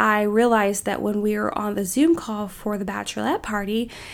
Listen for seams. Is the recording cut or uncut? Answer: uncut